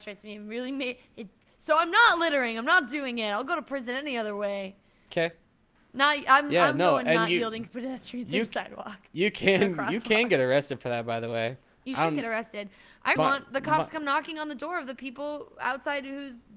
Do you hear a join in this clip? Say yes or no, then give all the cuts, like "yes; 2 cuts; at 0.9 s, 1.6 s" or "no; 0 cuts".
yes; 1 cut; at 13.2 s